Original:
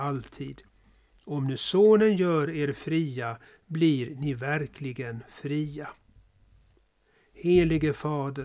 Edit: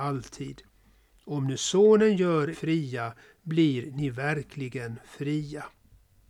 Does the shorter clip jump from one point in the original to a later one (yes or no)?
yes